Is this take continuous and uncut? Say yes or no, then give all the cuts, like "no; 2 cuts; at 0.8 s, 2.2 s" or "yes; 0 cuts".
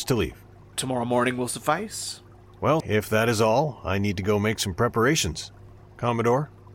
no; 2 cuts; at 2.8 s, 5.8 s